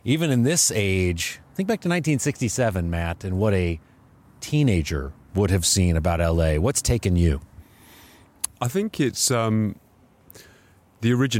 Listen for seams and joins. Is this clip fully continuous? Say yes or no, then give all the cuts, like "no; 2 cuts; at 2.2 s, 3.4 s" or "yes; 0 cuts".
no; 1 cut; at 8.5 s